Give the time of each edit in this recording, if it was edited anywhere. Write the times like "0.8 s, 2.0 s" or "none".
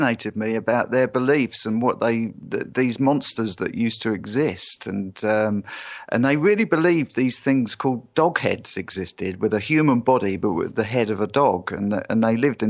none